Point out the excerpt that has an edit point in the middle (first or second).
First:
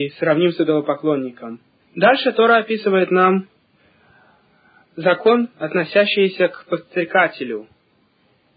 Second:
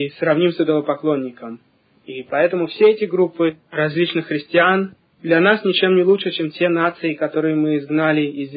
first